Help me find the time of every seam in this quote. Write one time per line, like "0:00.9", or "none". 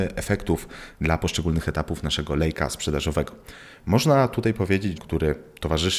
0:05.0